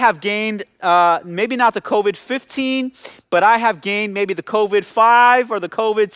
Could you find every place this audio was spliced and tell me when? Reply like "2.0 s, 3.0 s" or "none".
none